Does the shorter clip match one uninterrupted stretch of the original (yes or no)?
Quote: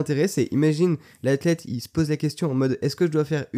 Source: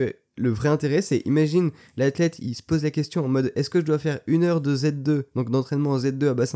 yes